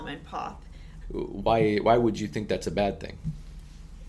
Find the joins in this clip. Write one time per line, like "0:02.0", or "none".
0:01.0